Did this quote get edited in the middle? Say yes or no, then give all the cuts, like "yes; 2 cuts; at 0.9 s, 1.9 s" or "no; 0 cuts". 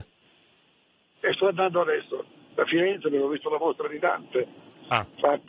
no; 0 cuts